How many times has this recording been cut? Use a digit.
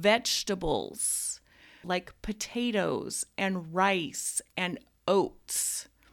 1